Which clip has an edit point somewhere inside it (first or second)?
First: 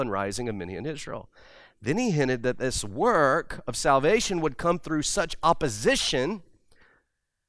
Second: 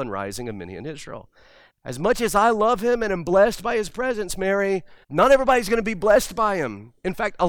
second